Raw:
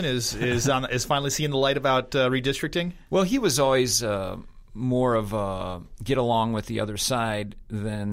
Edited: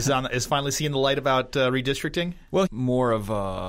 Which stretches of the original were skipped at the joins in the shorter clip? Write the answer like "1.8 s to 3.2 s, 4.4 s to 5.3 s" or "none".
3.2 s to 4.7 s